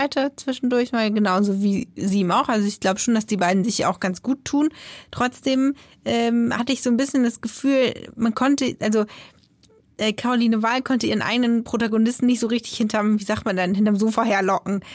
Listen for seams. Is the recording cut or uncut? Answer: uncut